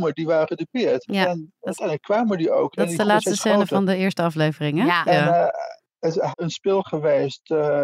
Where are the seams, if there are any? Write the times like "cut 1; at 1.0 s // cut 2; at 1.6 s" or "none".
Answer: cut 1; at 5.0 s // cut 2; at 6.3 s